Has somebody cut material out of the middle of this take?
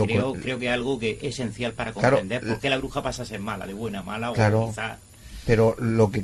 no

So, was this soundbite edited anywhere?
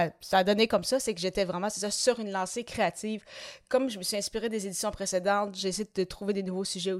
no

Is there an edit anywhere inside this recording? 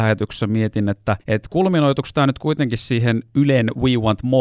yes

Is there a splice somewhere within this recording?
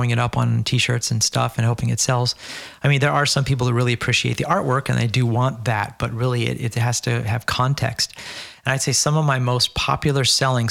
no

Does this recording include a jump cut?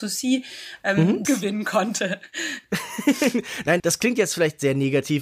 yes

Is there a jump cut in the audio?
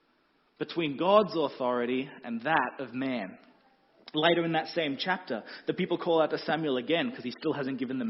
no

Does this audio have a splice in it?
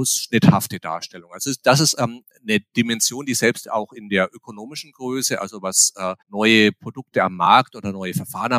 yes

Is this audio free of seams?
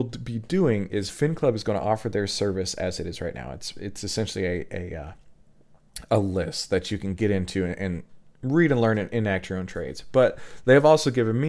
yes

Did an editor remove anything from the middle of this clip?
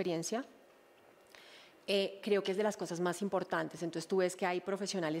no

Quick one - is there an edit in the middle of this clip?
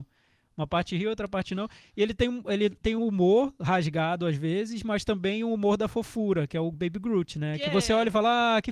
yes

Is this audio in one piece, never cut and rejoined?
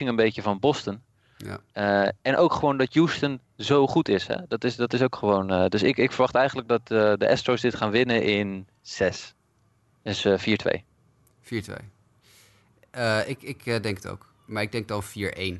yes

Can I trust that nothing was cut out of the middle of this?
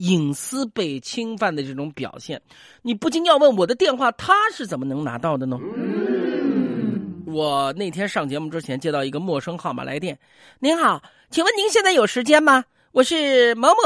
yes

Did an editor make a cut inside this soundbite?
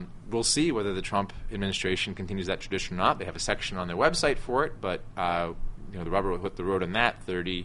no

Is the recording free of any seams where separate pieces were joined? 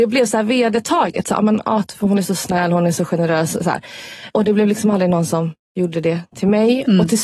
no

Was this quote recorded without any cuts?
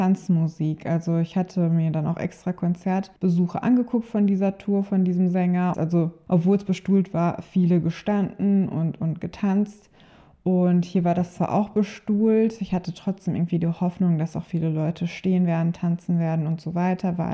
no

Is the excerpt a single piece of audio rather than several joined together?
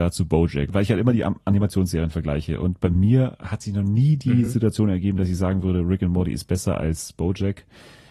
yes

